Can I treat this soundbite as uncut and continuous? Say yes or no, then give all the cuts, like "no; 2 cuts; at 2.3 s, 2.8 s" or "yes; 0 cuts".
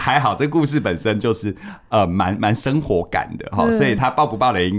yes; 0 cuts